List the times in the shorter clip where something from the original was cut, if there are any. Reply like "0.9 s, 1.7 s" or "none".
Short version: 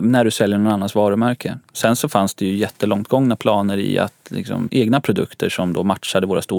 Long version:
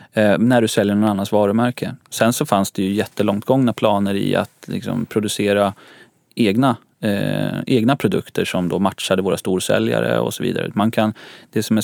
4.7 s